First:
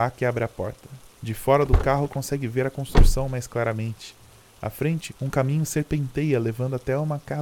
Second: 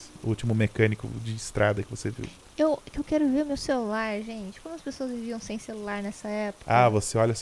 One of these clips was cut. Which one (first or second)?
first